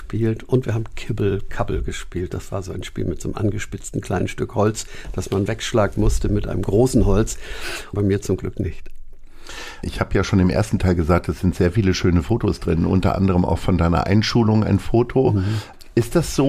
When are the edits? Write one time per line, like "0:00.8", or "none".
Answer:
0:07.9